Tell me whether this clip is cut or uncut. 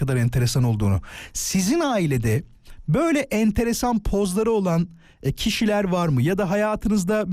uncut